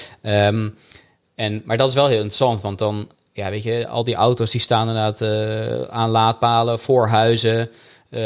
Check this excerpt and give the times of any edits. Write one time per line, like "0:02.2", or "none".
none